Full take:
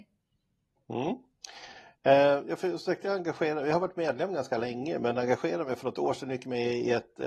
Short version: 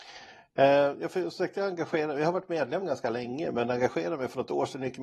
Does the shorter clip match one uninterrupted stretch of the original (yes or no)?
yes